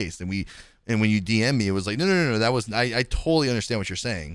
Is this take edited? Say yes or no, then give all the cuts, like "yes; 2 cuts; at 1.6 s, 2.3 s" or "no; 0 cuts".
no; 0 cuts